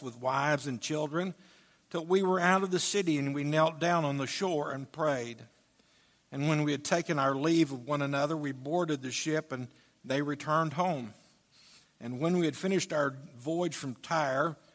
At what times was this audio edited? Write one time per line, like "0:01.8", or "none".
none

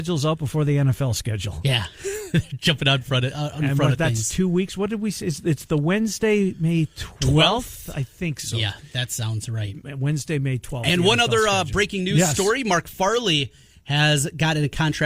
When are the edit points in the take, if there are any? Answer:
none

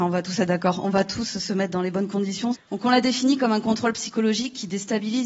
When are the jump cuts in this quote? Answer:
0:02.5

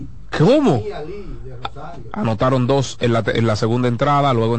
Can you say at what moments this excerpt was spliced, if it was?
0:02.1

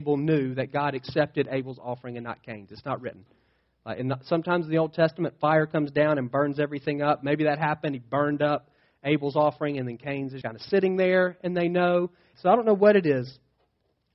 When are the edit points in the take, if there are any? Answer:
0:10.4
0:12.3

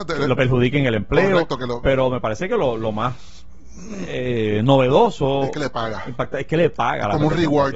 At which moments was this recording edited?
none

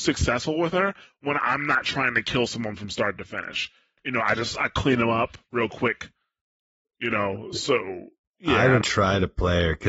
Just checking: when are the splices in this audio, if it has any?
0:04.0
0:08.8

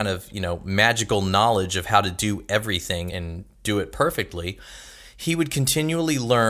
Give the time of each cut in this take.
0:03.1

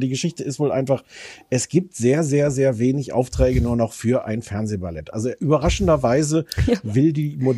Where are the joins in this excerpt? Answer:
none

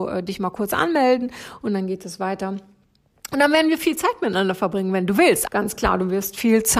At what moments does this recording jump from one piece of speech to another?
0:05.5

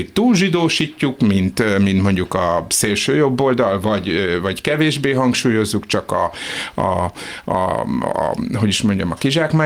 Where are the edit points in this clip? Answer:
none

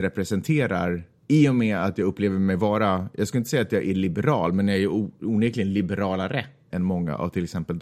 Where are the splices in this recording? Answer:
0:06.7

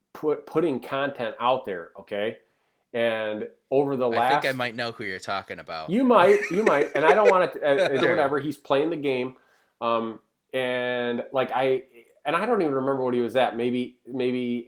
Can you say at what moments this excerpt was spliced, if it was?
0:08.0

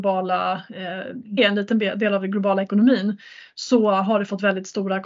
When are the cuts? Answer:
0:01.4

